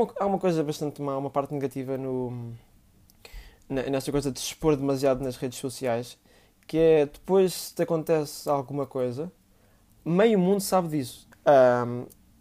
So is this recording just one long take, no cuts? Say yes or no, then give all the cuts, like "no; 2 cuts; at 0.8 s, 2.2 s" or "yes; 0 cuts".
no; 1 cut; at 11.3 s